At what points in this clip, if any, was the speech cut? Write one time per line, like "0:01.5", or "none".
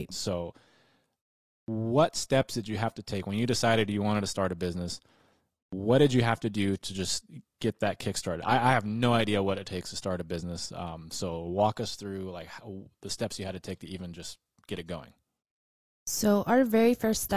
none